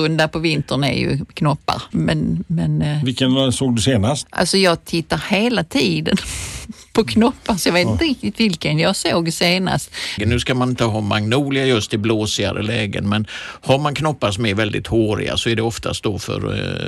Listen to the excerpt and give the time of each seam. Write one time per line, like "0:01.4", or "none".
0:01.9
0:10.2